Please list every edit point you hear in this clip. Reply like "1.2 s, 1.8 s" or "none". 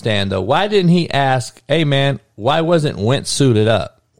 none